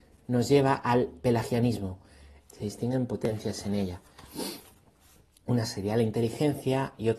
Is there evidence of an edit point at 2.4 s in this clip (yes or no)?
yes